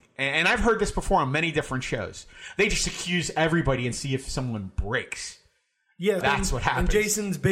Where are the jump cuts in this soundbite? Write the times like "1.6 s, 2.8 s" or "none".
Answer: 6.2 s